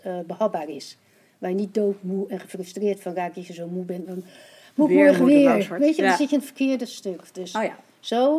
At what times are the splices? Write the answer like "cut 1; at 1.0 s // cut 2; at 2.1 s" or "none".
none

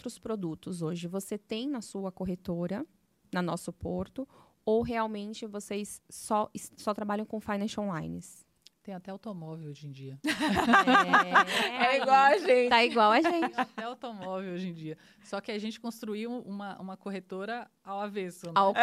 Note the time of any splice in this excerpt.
none

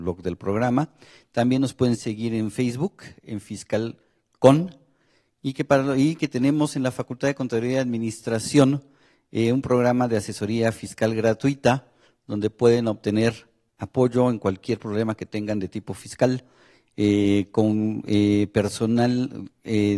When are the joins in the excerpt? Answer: none

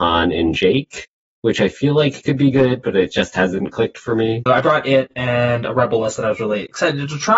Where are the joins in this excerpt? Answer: cut 1; at 4.5 s

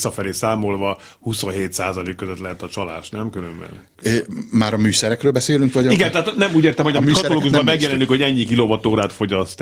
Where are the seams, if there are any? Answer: none

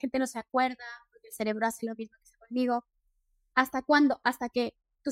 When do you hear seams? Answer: cut 1; at 3.5 s

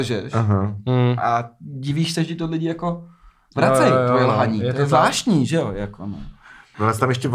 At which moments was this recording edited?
none

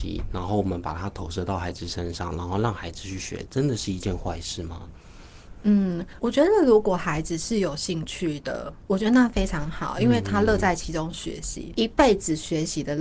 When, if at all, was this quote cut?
cut 1; at 6.2 s // cut 2; at 11.7 s

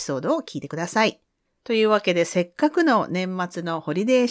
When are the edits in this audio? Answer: cut 1; at 1.6 s

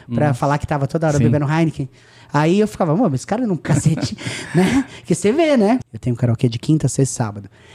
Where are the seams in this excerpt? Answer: cut 1; at 3.6 s // cut 2; at 5.8 s

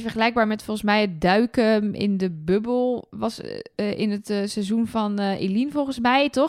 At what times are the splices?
none

